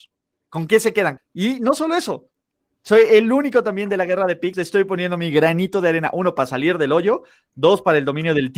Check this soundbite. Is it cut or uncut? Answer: cut